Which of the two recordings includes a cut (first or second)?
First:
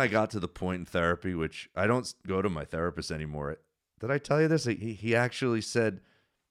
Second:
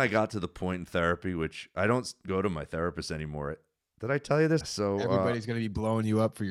second